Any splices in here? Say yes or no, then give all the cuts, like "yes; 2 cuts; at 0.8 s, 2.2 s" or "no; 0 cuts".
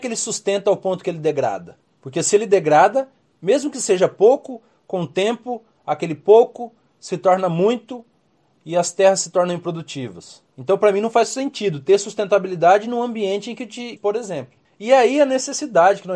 yes; 2 cuts; at 10.5 s, 14.0 s